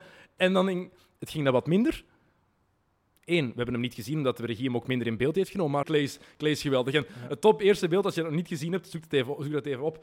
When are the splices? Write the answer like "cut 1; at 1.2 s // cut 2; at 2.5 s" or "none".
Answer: cut 1; at 1.2 s // cut 2; at 5.8 s

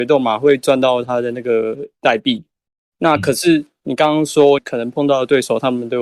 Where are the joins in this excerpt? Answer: cut 1; at 2.8 s // cut 2; at 4.6 s

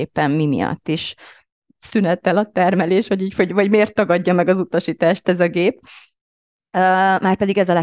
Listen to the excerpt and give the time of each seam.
none

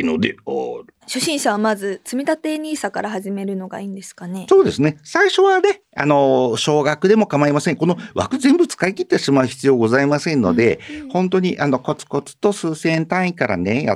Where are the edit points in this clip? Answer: cut 1; at 1.0 s

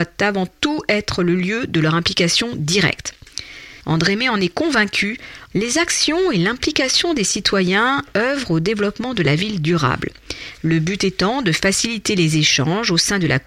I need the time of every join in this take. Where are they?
cut 1; at 3.8 s // cut 2; at 5.5 s // cut 3; at 10.6 s

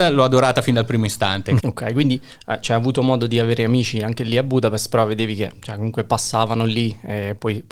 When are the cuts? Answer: cut 1; at 1.6 s

